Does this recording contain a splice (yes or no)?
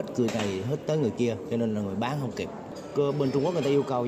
no